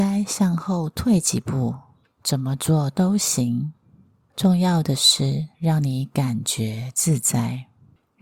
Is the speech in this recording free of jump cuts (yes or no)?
no